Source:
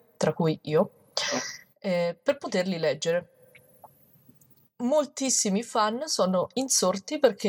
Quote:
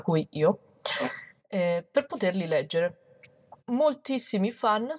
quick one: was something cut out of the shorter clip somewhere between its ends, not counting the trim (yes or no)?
yes